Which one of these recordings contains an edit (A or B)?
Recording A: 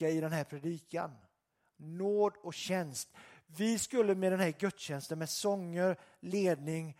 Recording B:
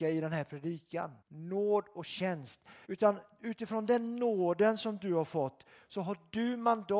B